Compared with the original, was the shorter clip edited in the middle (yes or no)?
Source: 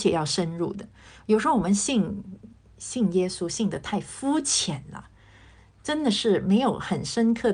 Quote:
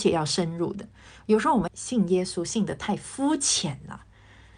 yes